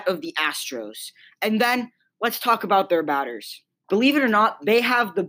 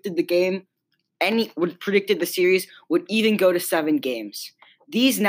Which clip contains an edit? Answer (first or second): first